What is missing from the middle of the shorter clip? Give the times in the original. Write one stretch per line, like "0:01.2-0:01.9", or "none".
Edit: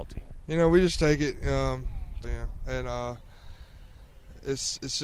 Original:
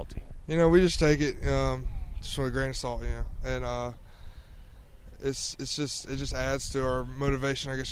0:02.2-0:03.0